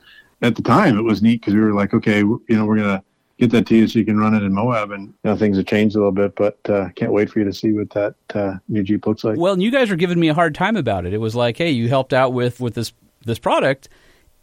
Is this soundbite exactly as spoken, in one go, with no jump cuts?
no; 1 cut; at 12.6 s

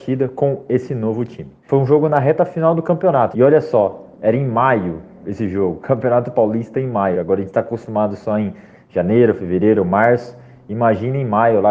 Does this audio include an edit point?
yes; 3 cuts; at 1.6 s, 3.3 s, 7.1 s

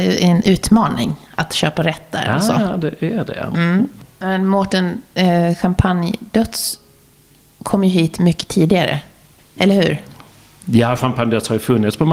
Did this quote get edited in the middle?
no; 0 cuts

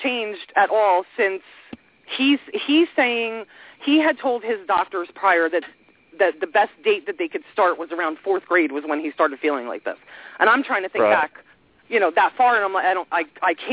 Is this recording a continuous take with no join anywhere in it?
yes; 0 cuts

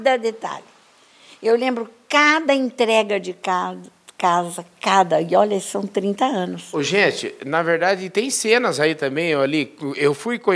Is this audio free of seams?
yes; 0 cuts

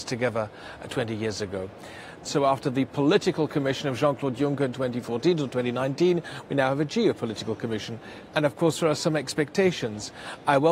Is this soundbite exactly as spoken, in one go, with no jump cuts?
no; 2 cuts; at 2.3 s, 8.3 s

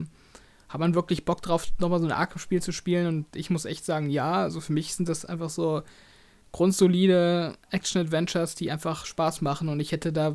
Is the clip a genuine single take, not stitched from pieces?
yes; 0 cuts

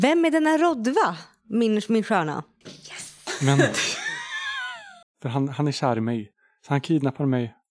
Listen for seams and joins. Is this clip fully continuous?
no; 2 cuts; at 2.6 s, 5.0 s

